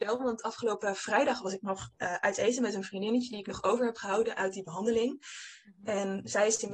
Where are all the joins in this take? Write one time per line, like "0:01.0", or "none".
none